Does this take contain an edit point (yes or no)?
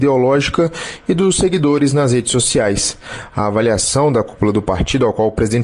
no